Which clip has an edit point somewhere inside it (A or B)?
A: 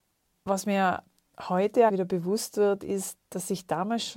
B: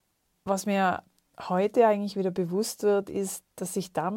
A